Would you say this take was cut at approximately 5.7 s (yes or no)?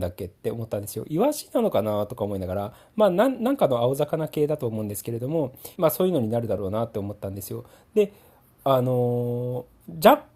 yes